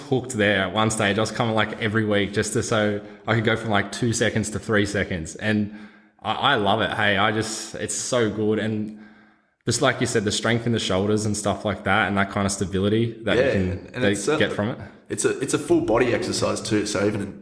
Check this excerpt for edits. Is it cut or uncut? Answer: uncut